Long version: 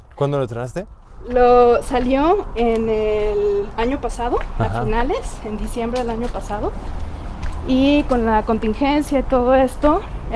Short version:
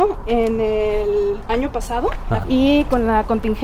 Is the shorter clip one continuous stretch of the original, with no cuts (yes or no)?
no